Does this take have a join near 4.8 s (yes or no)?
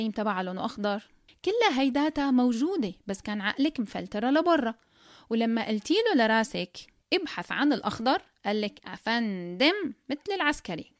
no